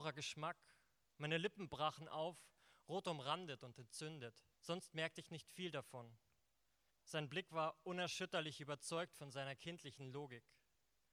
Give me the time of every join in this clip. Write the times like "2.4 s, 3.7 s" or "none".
4.5 s, 6.9 s